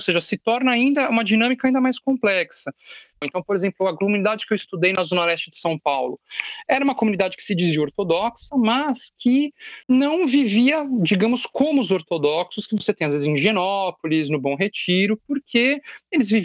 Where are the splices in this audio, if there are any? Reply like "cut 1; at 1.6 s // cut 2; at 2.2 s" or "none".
cut 1; at 3.2 s // cut 2; at 9.8 s